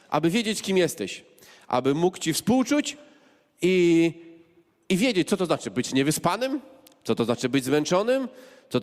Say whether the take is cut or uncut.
uncut